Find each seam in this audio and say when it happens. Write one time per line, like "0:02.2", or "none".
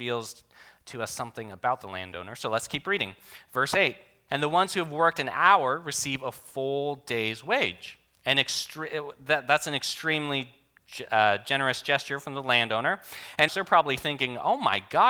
0:04.3
0:13.5